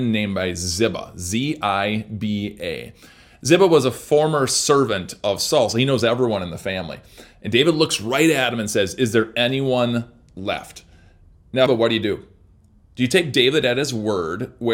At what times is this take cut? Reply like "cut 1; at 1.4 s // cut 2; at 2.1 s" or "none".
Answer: cut 1; at 11.7 s